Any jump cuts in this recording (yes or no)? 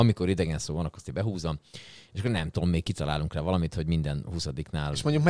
no